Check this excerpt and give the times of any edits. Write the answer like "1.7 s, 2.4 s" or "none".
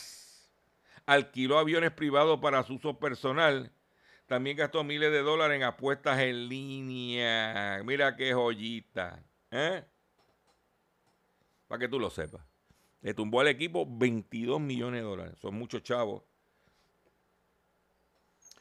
none